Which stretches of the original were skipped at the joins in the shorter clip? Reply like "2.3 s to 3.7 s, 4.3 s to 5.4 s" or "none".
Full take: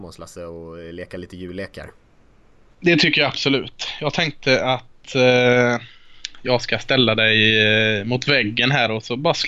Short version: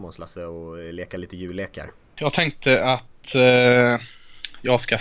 2.2 s to 4.0 s